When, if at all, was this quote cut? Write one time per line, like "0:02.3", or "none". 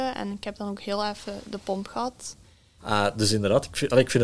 0:02.8

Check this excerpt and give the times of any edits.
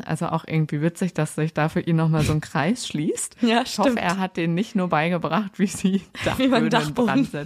none

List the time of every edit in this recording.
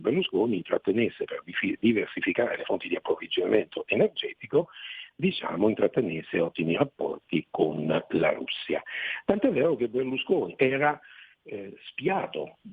0:10.6

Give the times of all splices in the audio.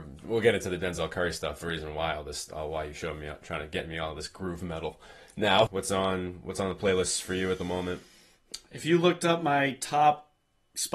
0:05.7

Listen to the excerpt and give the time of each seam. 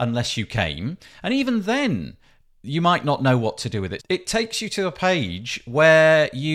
0:04.0

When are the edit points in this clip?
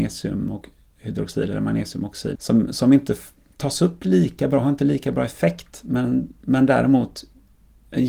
0:02.4

